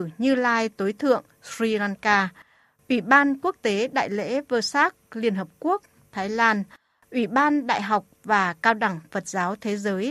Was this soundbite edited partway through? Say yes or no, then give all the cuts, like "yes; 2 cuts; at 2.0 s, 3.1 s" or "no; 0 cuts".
no; 0 cuts